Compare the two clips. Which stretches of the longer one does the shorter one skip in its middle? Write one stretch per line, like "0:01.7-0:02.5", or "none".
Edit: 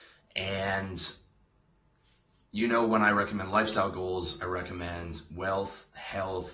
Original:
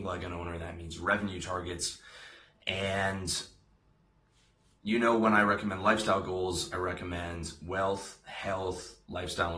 none